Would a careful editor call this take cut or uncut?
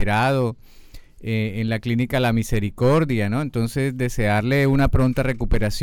uncut